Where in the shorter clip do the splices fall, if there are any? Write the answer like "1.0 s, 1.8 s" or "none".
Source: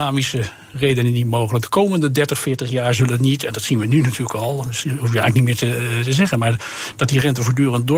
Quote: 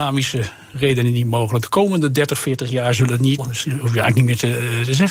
3.4 s